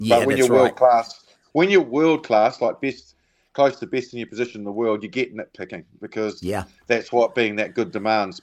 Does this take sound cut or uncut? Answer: uncut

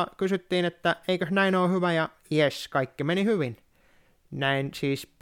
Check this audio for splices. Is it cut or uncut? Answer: uncut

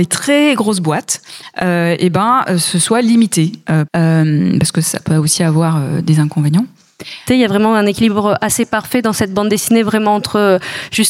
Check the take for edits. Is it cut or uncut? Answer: cut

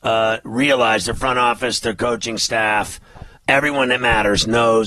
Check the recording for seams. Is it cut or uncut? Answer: cut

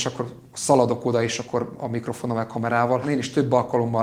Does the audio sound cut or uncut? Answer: cut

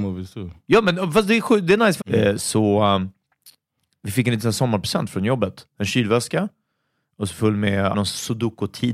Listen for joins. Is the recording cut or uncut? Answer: cut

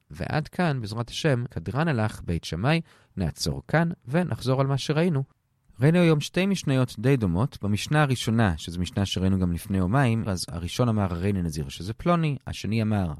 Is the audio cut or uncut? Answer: cut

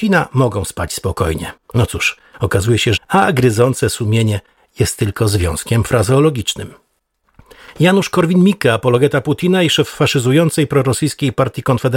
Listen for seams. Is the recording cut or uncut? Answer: cut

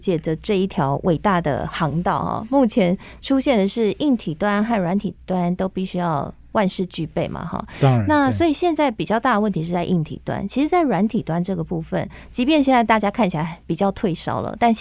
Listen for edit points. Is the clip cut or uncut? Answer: uncut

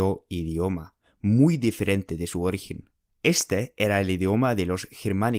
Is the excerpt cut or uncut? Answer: cut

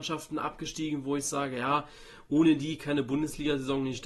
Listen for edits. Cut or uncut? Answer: uncut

